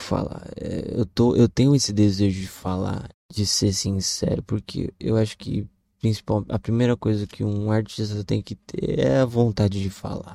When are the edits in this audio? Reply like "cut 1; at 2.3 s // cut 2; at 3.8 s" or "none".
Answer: cut 1; at 3.1 s